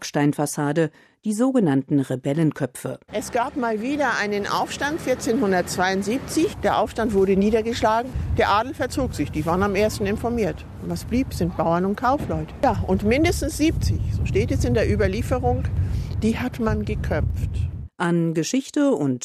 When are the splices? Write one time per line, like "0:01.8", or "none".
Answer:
none